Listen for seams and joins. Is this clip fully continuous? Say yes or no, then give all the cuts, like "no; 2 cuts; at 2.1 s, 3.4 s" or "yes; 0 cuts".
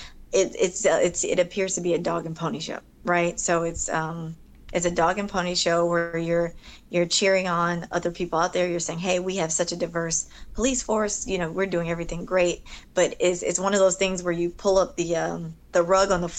yes; 0 cuts